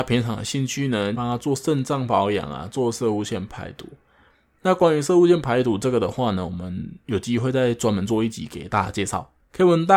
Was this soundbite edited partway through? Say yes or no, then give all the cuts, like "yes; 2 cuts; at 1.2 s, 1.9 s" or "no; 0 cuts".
yes; 1 cut; at 1.1 s